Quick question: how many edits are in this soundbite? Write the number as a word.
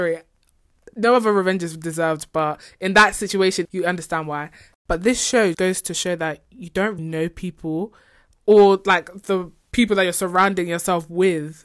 three